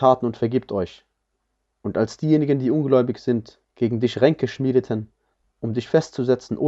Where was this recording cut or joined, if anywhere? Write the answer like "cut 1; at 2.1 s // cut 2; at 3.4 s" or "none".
cut 1; at 1.7 s